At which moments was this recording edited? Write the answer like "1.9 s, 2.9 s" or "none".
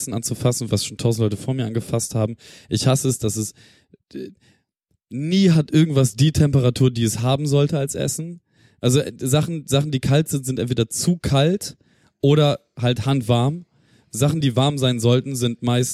none